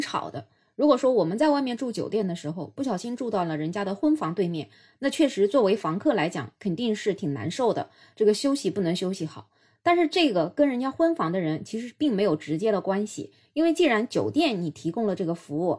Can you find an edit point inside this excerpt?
no; 0 cuts

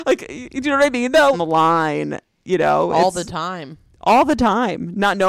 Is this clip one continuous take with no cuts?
no; 1 cut; at 1.3 s

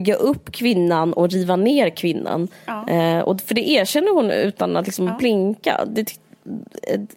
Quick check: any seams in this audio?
no; 0 cuts

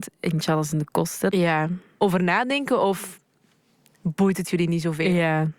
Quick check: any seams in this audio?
yes; 1 cut; at 1.3 s

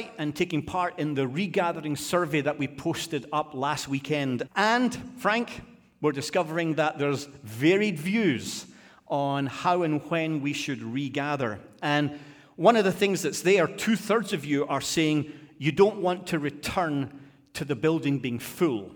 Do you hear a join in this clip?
yes; 1 cut; at 4.5 s

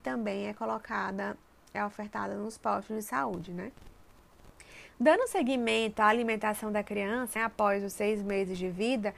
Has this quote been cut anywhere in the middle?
yes; 1 cut; at 7.4 s

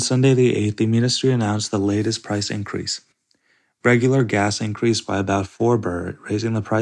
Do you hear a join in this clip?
no; 0 cuts

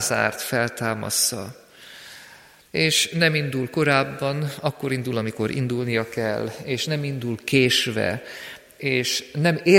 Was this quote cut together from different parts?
yes; 1 cut; at 2.7 s

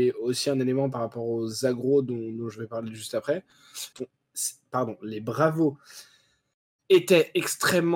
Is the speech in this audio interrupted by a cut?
yes; 1 cut; at 3.9 s

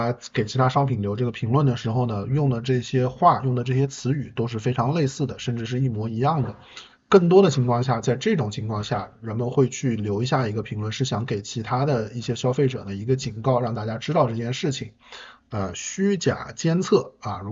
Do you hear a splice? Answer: yes; 2 cuts; at 7.0 s, 15.4 s

